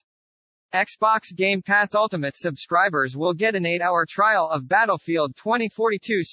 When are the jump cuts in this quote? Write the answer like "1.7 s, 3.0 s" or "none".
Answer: none